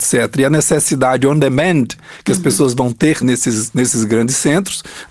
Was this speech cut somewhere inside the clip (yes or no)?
yes